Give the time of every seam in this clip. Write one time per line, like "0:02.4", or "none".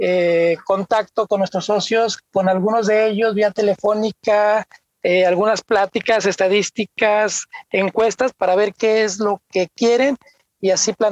none